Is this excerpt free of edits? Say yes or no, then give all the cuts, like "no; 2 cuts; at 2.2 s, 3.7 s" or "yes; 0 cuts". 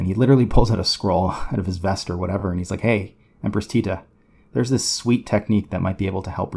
yes; 0 cuts